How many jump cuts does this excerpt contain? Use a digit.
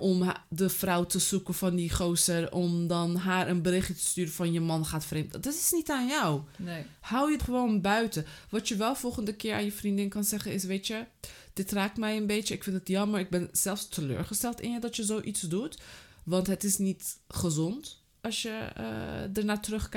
1